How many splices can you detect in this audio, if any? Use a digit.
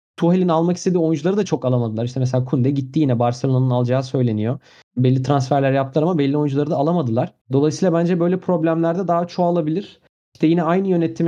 1